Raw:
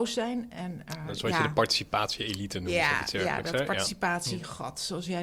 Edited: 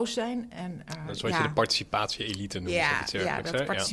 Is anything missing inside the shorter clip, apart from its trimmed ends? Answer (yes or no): no